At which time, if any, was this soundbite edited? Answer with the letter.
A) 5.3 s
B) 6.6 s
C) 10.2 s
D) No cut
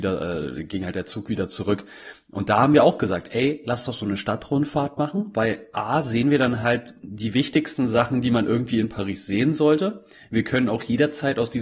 D